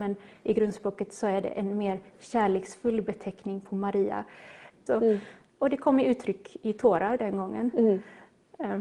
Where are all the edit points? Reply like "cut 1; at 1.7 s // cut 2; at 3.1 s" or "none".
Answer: cut 1; at 4.9 s